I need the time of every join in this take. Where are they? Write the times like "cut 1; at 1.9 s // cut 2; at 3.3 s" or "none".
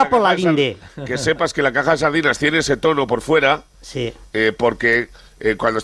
none